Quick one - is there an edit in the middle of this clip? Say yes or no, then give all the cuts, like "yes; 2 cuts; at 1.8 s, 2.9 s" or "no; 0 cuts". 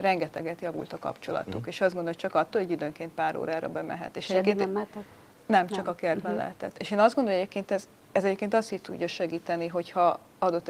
no; 0 cuts